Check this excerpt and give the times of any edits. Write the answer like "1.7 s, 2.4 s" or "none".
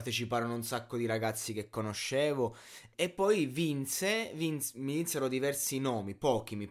2.9 s